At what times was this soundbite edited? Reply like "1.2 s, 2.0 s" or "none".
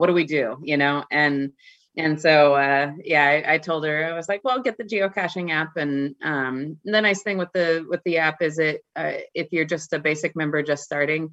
none